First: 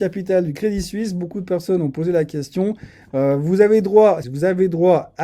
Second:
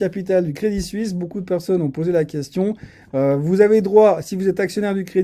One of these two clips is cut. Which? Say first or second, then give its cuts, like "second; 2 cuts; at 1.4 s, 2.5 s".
first; 1 cut; at 4.2 s